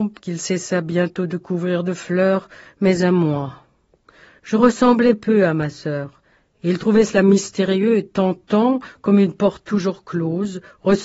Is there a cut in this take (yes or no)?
no